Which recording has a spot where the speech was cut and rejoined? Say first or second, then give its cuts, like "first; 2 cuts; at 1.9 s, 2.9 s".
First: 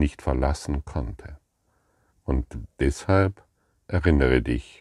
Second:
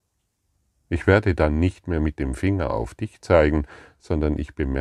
first; 1 cut; at 2.1 s